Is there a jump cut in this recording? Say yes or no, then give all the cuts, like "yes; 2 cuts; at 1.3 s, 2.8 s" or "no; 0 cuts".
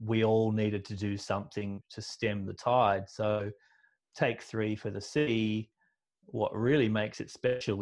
yes; 1 cut; at 1.8 s